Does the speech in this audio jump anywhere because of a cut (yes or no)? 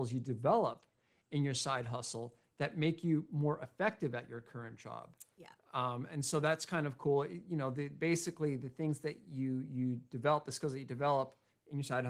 no